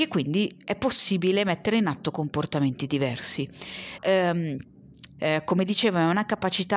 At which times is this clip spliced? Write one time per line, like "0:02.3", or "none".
0:04.0
0:05.2